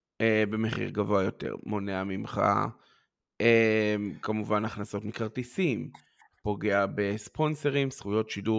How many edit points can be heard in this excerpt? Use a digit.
0